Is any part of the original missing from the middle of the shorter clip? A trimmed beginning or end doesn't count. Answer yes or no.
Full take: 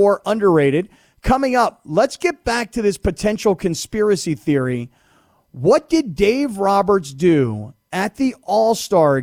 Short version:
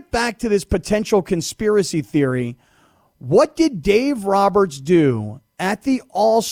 no